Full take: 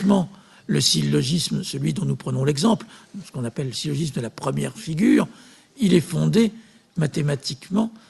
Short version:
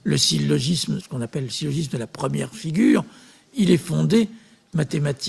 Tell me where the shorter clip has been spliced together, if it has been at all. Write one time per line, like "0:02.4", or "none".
0:01.0